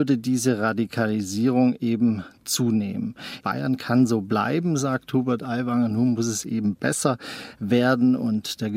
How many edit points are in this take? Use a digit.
1